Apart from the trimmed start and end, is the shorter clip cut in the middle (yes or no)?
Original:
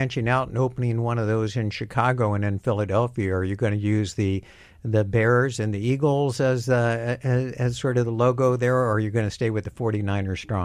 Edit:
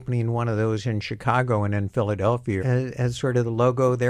yes